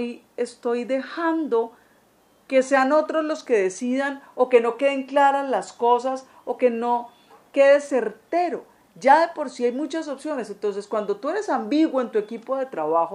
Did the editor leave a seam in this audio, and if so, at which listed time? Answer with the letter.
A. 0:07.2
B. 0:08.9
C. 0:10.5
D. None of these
D